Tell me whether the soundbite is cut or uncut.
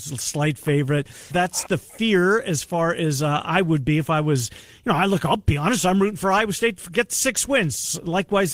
cut